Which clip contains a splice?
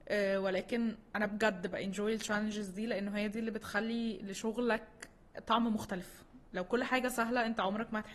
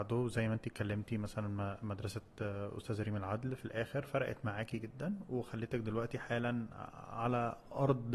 first; 1 cut; at 6.5 s

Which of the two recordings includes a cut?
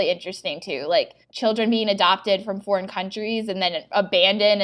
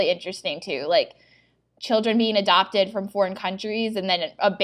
first; 1 cut; at 1.2 s

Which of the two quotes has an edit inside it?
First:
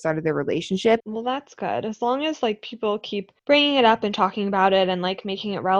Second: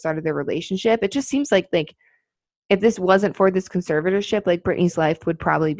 first; 2 cuts; at 1.0 s, 3.4 s

